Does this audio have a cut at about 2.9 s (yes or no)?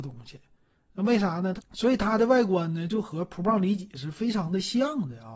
no